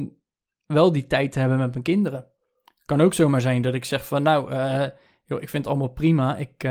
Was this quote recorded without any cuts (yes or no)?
yes